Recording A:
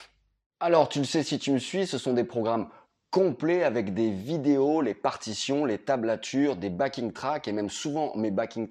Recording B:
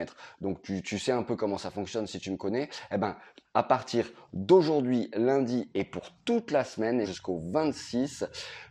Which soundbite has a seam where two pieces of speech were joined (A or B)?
B